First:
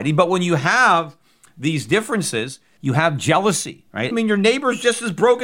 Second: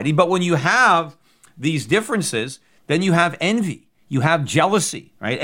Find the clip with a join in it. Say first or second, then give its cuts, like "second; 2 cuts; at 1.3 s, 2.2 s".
first; 2 cuts; at 2.8 s, 4.1 s